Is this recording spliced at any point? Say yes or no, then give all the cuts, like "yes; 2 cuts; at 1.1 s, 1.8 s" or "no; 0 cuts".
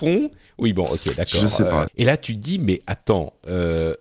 yes; 1 cut; at 1.9 s